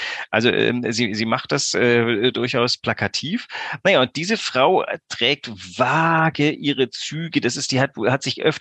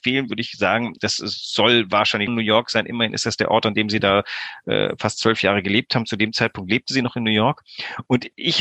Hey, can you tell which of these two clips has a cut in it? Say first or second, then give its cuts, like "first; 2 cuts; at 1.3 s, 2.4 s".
second; 2 cuts; at 1.0 s, 2.3 s